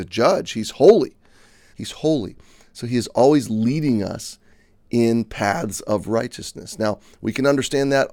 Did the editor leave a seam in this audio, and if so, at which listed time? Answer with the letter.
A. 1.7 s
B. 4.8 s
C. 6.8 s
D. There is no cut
A